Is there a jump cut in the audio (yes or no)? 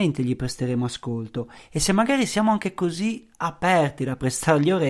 no